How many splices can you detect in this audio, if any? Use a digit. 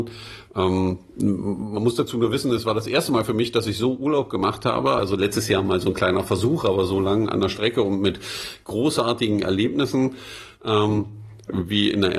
1